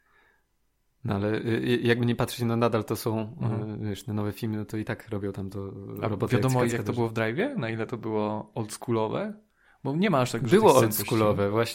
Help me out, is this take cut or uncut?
cut